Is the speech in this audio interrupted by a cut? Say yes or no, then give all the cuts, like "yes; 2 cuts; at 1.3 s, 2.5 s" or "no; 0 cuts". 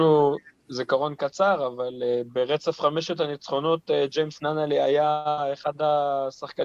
no; 0 cuts